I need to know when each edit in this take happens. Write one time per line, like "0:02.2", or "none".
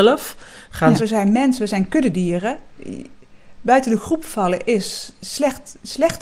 0:01.0